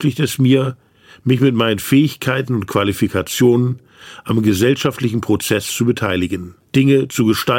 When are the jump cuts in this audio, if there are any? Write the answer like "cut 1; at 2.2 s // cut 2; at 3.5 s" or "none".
cut 1; at 6.7 s